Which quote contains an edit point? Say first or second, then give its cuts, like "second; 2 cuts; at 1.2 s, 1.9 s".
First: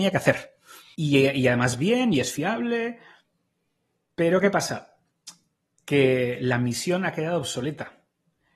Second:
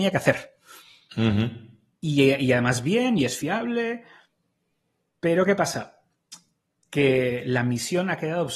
first; 1 cut; at 0.9 s